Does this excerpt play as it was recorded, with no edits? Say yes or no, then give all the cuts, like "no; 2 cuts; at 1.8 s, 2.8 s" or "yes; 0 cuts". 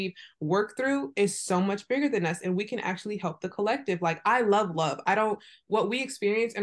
yes; 0 cuts